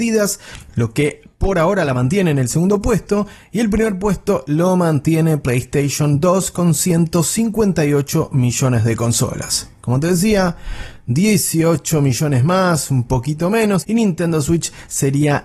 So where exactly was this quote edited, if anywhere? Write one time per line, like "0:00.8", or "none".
0:13.8